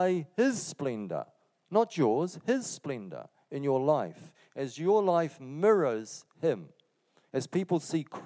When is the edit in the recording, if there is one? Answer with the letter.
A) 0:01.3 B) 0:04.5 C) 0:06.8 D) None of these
D